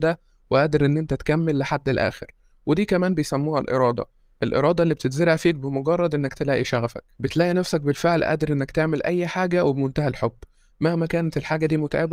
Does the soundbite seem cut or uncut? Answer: cut